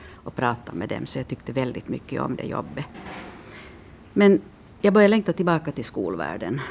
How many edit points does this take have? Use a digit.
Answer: 0